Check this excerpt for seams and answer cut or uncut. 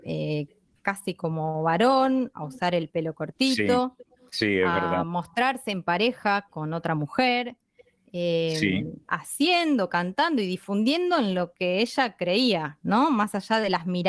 cut